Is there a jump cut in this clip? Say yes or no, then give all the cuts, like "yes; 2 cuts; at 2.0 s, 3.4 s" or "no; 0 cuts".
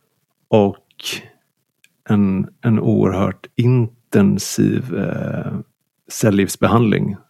no; 0 cuts